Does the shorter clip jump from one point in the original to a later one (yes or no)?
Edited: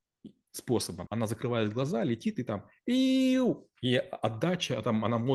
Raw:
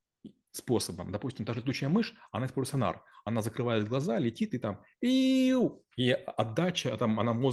yes